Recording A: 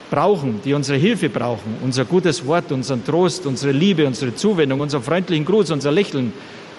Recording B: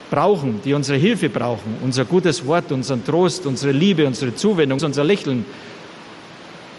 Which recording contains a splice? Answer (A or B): B